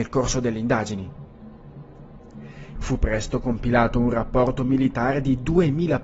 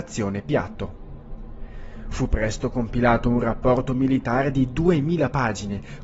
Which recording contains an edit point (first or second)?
first